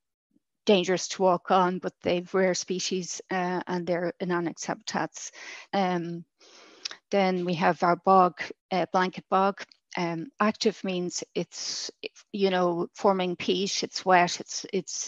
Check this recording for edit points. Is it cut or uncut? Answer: cut